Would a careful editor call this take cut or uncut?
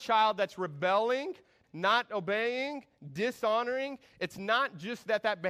cut